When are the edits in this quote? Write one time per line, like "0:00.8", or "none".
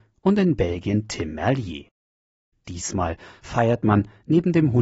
0:02.5